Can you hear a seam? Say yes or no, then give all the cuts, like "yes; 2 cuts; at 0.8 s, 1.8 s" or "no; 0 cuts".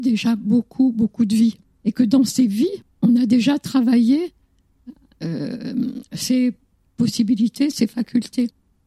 no; 0 cuts